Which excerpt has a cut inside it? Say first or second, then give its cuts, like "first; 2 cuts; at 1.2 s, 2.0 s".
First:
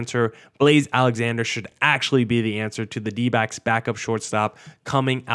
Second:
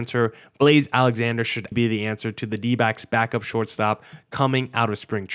second; 1 cut; at 1.7 s